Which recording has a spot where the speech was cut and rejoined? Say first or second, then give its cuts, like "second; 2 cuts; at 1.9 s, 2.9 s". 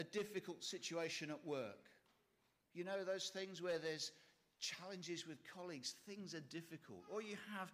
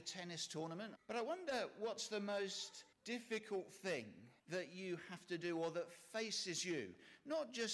second; 3 cuts; at 1.0 s, 2.9 s, 4.4 s